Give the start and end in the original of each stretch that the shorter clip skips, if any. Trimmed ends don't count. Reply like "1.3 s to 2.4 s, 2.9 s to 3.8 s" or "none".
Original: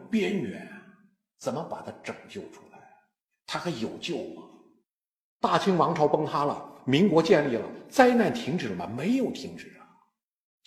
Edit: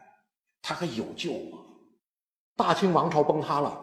none